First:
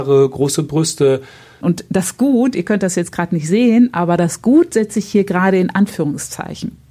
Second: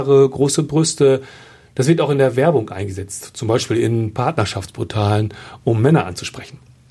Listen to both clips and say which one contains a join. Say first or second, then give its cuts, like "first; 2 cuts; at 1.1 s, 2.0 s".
first; 1 cut; at 1.6 s